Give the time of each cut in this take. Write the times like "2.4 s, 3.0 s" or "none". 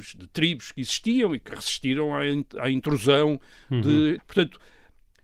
4.2 s